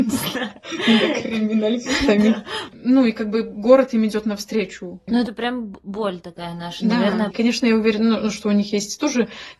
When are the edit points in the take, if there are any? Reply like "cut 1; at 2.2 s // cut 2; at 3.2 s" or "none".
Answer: cut 1; at 2.7 s // cut 2; at 5.1 s // cut 3; at 7.3 s